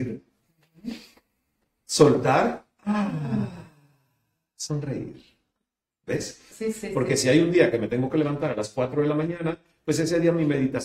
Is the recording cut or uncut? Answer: cut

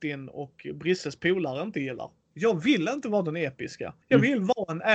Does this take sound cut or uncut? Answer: cut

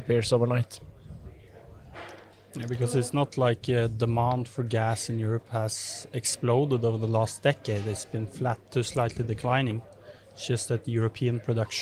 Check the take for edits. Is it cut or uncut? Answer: uncut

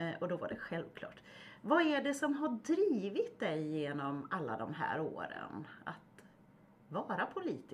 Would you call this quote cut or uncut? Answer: uncut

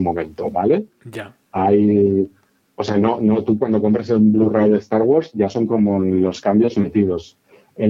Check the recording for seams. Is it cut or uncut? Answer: uncut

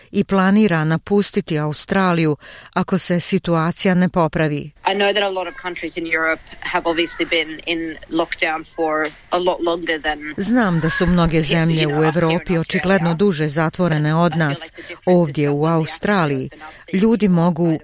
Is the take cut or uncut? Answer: cut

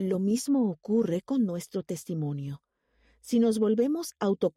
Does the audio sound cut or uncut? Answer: uncut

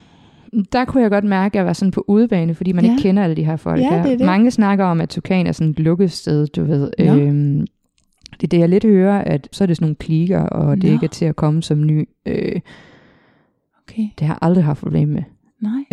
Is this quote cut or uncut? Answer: cut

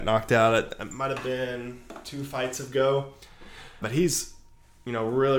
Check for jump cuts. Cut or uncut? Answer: cut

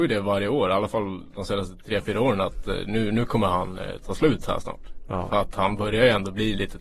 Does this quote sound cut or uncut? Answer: uncut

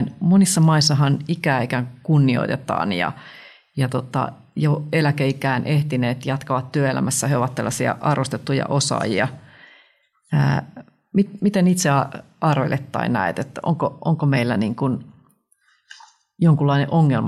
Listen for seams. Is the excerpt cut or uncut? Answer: uncut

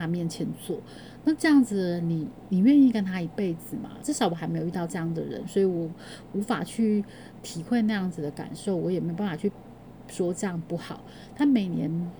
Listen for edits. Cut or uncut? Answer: cut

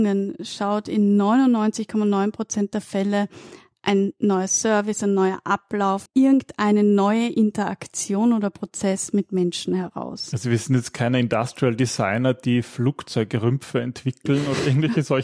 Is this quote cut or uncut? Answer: cut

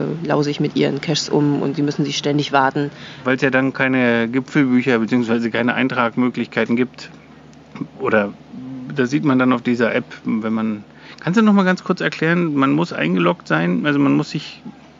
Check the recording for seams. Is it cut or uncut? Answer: cut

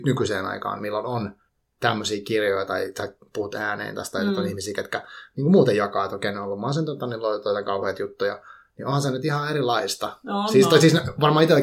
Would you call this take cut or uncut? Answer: uncut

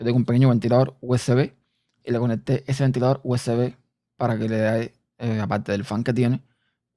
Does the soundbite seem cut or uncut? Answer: uncut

